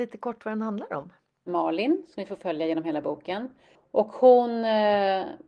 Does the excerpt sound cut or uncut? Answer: cut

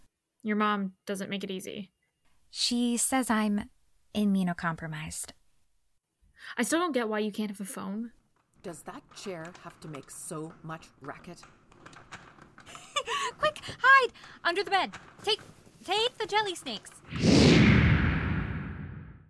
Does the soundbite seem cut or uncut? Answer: cut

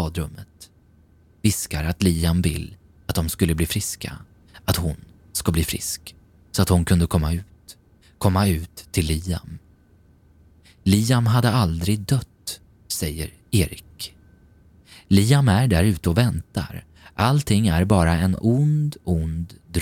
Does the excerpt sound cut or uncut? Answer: uncut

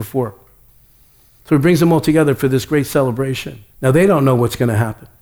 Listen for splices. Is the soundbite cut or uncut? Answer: cut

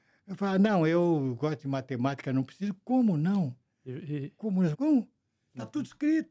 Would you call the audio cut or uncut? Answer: cut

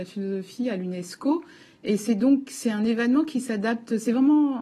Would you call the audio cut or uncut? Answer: uncut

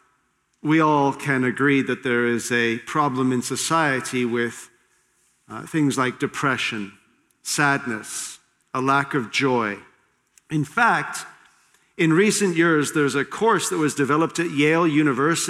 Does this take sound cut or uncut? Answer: uncut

